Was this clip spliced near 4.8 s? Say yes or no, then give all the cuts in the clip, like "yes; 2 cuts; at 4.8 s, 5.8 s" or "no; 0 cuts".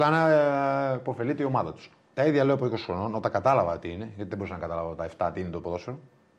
no; 1 cut; at 2.1 s